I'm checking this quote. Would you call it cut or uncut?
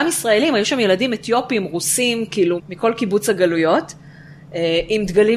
cut